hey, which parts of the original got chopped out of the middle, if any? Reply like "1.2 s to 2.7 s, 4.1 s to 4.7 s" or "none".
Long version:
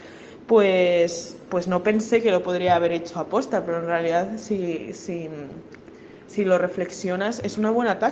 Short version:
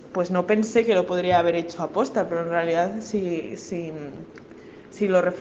none